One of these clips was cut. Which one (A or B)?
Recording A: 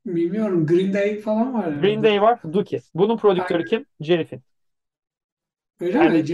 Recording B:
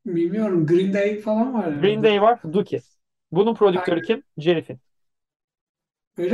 A